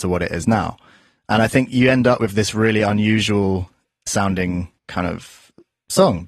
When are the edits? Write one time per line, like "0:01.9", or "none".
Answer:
0:04.8